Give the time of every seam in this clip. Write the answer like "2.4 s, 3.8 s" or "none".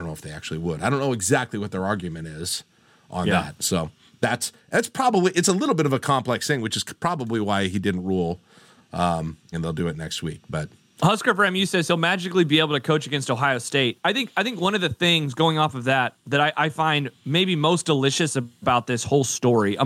9.5 s